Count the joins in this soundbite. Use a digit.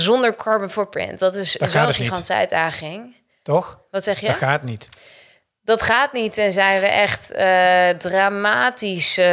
0